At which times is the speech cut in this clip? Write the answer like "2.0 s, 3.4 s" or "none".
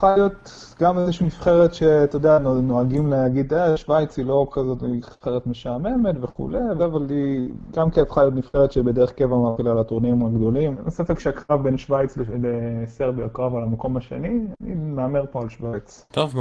6.8 s, 10.7 s